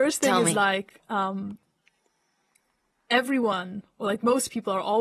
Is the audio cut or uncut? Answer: uncut